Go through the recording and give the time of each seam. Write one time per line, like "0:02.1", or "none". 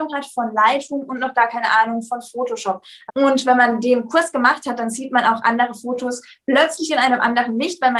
0:03.1